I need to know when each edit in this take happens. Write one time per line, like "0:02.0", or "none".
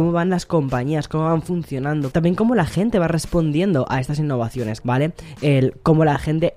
0:02.1
0:04.8